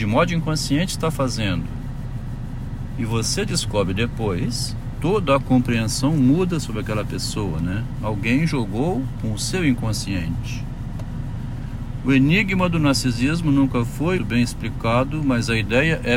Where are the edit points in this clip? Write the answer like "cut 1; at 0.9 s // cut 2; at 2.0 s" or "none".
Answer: cut 1; at 14.2 s